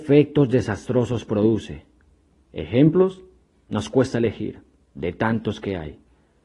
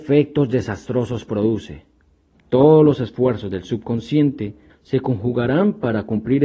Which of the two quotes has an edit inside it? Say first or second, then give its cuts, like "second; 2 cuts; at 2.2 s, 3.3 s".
second; 2 cuts; at 2.3 s, 4.7 s